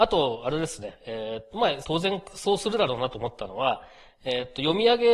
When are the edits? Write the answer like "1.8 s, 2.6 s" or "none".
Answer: 1.8 s